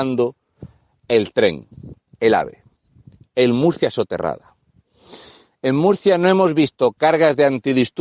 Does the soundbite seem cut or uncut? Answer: uncut